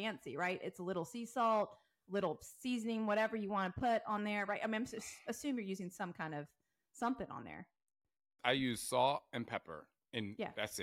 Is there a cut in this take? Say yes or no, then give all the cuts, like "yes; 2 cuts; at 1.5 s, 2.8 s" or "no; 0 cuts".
no; 0 cuts